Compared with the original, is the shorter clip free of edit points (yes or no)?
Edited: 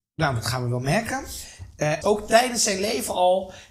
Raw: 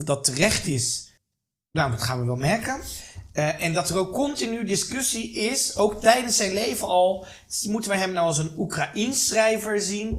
no